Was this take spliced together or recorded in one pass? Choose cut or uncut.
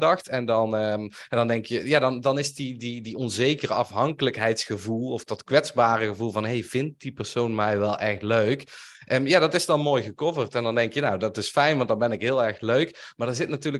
uncut